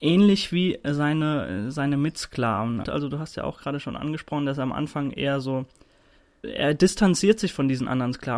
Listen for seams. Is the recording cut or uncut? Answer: cut